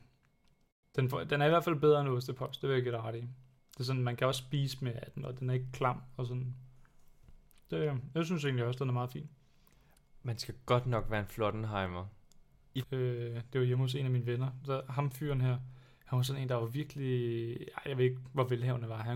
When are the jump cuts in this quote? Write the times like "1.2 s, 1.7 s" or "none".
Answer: 12.8 s